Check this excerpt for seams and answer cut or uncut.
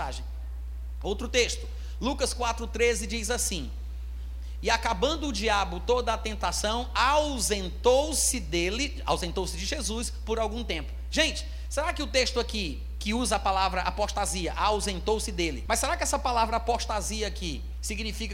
cut